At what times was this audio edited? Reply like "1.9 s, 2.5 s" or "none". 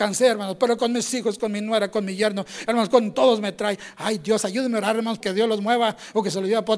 5.2 s